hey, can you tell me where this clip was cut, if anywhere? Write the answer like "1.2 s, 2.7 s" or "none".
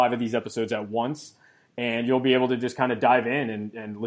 none